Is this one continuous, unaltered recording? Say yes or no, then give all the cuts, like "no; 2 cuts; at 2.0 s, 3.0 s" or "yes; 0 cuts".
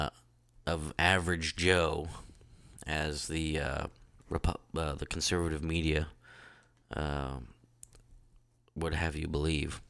no; 1 cut; at 4.2 s